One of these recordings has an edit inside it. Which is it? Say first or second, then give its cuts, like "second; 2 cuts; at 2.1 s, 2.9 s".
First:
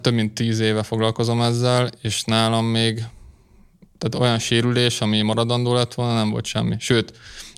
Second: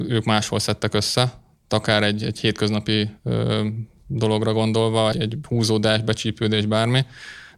second; 1 cut; at 5.1 s